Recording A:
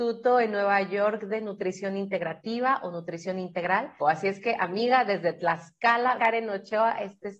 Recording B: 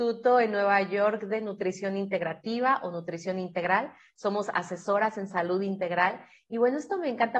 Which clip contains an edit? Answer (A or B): A